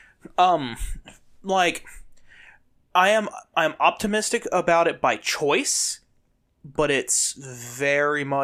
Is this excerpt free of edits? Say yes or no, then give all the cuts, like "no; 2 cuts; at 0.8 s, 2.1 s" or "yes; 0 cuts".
yes; 0 cuts